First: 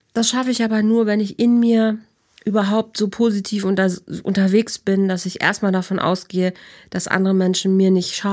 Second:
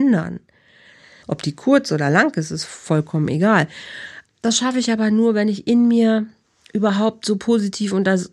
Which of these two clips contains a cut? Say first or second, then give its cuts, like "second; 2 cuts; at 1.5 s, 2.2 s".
second; 2 cuts; at 1.2 s, 4.3 s